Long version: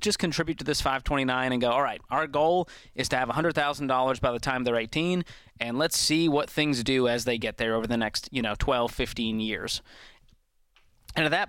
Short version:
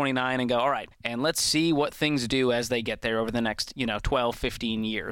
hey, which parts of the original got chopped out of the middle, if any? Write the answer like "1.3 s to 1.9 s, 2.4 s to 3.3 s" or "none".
2.0 s to 5.5 s